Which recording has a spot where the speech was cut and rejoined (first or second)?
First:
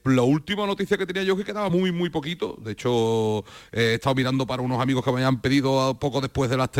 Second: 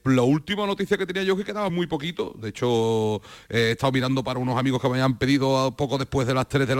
second